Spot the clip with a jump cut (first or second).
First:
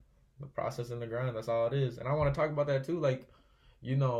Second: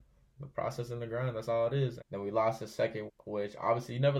second